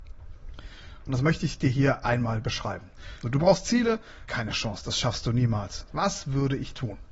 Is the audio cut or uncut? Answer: cut